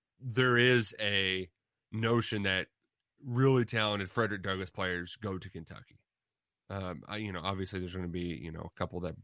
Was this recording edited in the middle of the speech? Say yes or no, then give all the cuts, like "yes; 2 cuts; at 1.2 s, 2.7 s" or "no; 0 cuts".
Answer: no; 0 cuts